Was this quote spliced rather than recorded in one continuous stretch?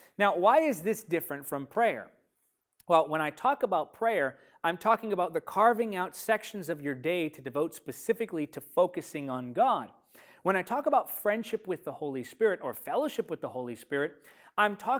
no; 0 cuts

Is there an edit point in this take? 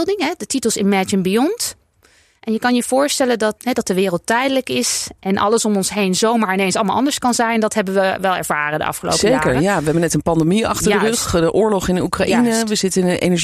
yes; 1 cut; at 3.6 s

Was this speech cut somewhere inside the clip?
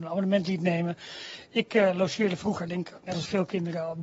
no; 0 cuts

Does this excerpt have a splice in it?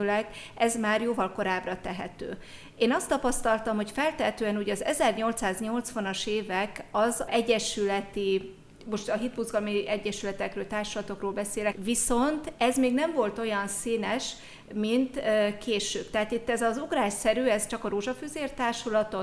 yes; 2 cuts; at 7.3 s, 11.7 s

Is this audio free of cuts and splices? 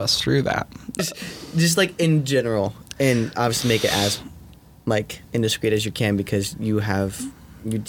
no; 1 cut; at 1.0 s

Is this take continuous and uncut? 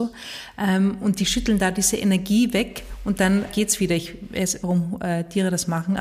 no; 2 cuts; at 3.5 s, 4.6 s

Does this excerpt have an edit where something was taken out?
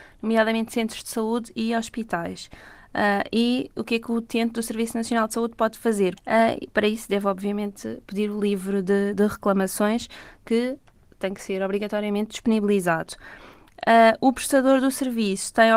yes; 1 cut; at 6.2 s

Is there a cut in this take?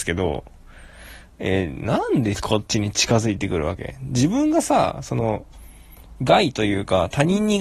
no; 0 cuts

